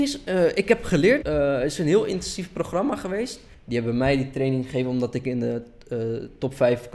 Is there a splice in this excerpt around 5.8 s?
no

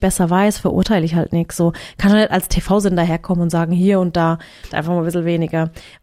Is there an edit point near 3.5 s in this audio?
no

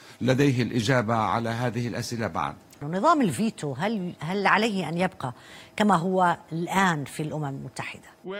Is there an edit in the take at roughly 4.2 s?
yes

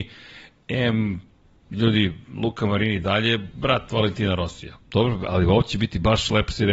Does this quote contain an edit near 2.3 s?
no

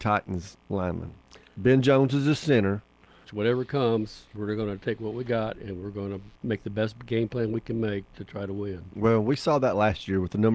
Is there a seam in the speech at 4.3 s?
yes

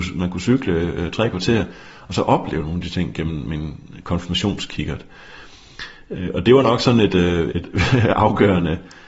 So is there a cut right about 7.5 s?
yes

